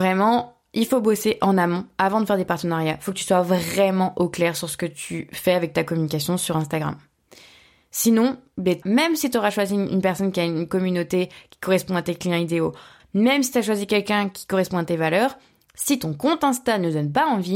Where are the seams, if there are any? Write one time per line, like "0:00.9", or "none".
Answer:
0:08.8
0:13.0